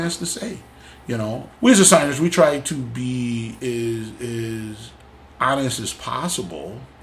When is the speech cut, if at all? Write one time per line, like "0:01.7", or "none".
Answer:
0:01.5